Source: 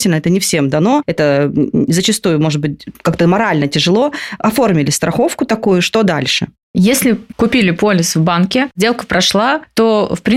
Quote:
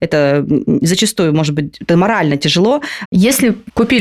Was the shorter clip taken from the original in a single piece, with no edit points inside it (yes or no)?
no